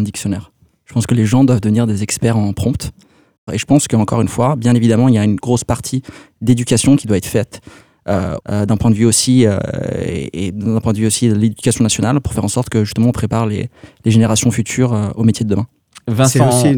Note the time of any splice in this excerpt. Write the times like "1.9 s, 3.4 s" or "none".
5.4 s, 8.4 s